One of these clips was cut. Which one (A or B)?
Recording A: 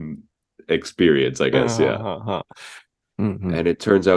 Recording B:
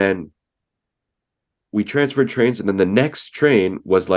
A